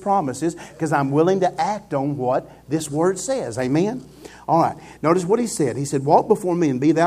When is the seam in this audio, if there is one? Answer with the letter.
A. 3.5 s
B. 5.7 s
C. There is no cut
C